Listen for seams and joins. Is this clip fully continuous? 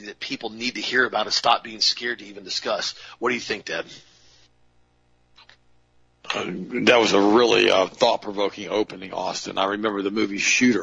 yes; 0 cuts

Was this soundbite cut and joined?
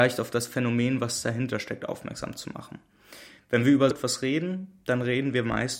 yes; 1 cut; at 3.9 s

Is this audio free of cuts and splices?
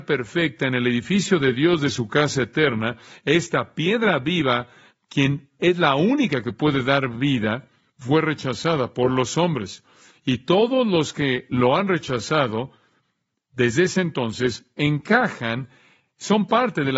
yes; 0 cuts

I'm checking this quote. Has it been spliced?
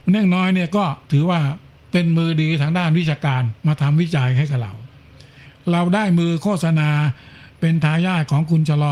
yes; 2 cuts; at 1.0 s, 3.6 s

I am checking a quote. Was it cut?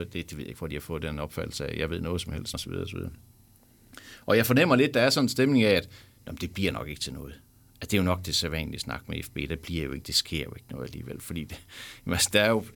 yes; 1 cut; at 2.5 s

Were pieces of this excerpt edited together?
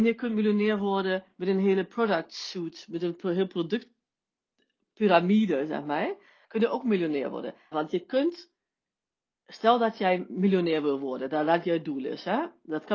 yes; 2 cuts; at 6.4 s, 7.7 s

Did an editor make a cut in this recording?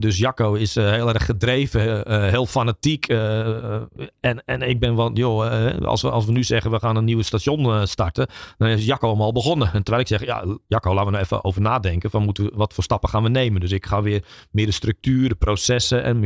no; 0 cuts

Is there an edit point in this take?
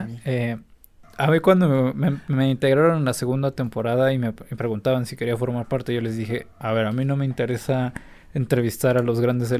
no; 0 cuts

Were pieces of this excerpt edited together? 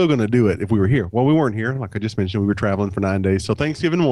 no; 0 cuts

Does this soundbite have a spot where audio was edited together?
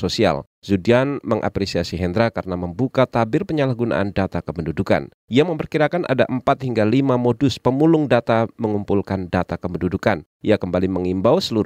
no; 0 cuts

